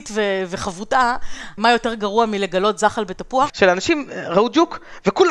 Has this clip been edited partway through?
yes; 2 cuts; at 1.6 s, 3.5 s

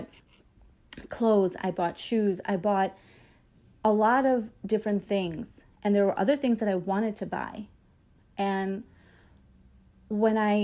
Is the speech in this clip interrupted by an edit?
no; 0 cuts

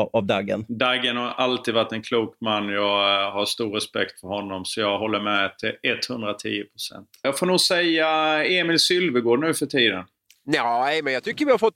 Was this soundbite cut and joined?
yes; 2 cuts; at 7.2 s, 10.4 s

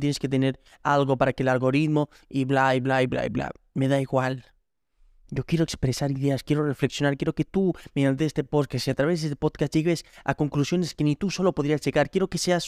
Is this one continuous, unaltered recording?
yes; 0 cuts

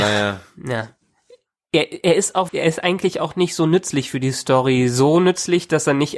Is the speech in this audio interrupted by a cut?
yes; 1 cut; at 2.5 s

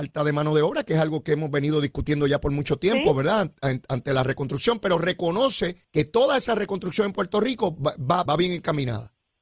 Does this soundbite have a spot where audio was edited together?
yes; 2 cuts; at 5.8 s, 8.3 s

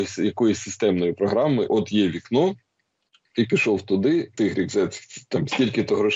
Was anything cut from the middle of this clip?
yes; 2 cuts; at 1.7 s, 4.4 s

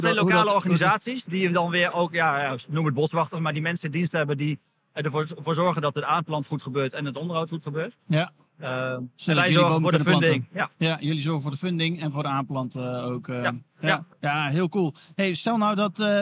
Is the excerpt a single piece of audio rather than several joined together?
no; 2 cuts; at 8.0 s, 14.1 s

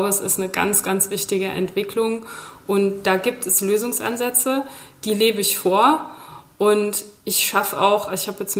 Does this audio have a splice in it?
no; 0 cuts

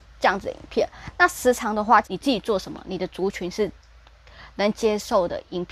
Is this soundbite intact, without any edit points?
no; 1 cut; at 2.0 s

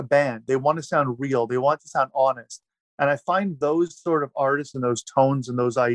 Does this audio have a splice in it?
no; 0 cuts

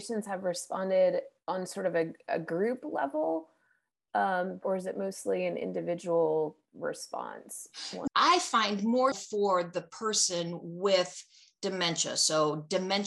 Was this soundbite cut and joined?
yes; 3 cuts; at 4.6 s, 8.1 s, 9.1 s

